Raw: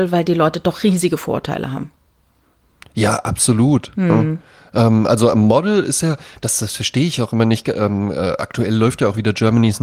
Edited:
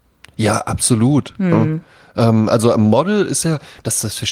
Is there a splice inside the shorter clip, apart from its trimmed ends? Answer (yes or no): no